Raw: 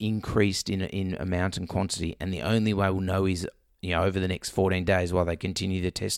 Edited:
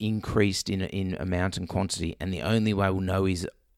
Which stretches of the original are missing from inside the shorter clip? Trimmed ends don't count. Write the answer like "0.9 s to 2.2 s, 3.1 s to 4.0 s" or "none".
none